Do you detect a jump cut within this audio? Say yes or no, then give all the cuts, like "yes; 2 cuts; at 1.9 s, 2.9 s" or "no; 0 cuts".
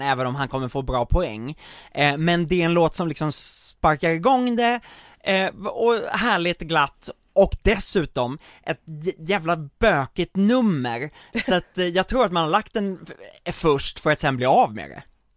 no; 0 cuts